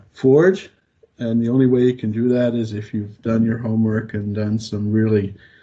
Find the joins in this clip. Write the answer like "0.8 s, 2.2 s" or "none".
none